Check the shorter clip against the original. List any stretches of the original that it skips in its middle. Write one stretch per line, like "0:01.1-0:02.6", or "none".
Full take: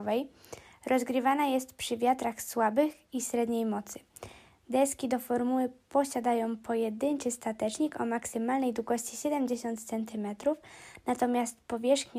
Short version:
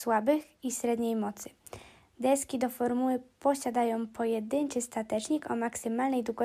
none